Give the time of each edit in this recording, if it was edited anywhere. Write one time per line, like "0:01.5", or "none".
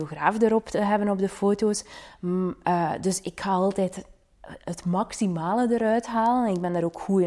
none